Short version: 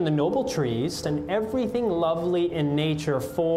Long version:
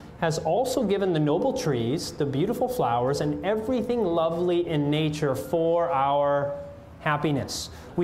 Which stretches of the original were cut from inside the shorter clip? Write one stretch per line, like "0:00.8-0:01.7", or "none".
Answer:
0:02.1-0:03.2

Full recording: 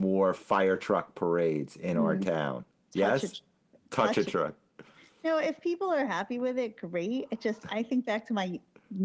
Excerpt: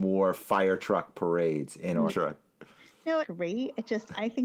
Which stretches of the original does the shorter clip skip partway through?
0:02.1-0:04.2
0:05.4-0:06.7

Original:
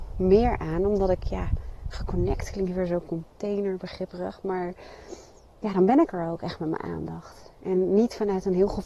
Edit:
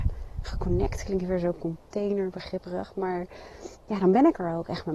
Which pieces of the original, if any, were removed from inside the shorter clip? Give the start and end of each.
0:05.2-0:05.5

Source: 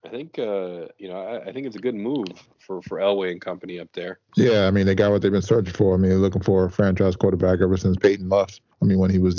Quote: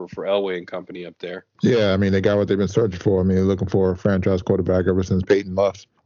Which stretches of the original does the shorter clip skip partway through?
none

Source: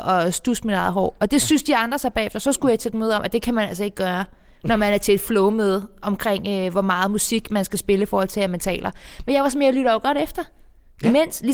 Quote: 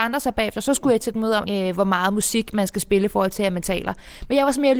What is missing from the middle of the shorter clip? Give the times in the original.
0:03.2-0:06.4

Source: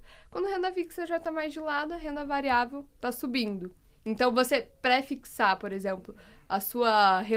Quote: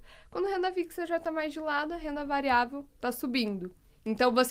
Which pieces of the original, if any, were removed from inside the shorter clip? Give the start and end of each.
none

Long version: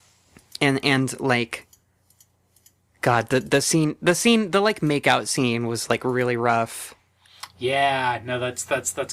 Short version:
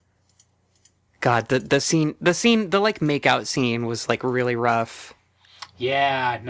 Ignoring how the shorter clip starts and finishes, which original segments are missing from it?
none

